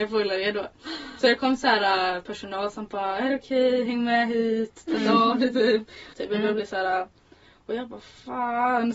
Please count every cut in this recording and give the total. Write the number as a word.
one